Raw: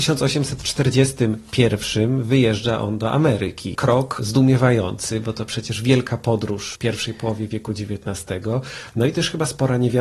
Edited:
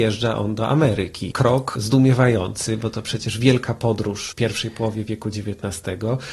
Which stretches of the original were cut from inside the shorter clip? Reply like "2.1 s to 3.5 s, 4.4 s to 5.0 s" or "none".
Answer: none